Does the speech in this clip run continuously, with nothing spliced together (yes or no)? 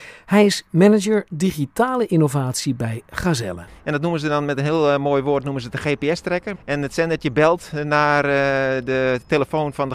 no